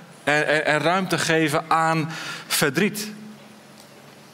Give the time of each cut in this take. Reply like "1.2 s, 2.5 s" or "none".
none